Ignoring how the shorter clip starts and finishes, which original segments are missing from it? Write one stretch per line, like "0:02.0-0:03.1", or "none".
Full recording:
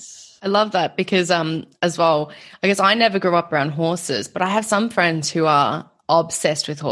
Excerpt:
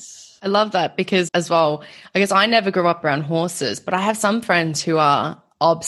0:01.3-0:01.8